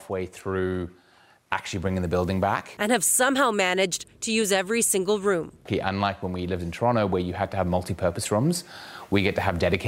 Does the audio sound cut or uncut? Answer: uncut